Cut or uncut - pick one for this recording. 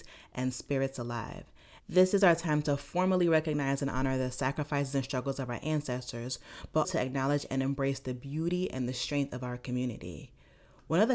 cut